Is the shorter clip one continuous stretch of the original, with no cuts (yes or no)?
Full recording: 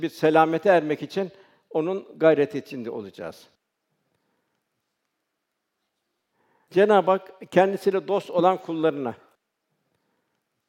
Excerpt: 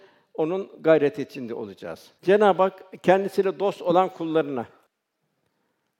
no